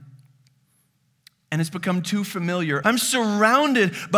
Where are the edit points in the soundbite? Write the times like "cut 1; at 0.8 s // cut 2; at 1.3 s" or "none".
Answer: cut 1; at 2.8 s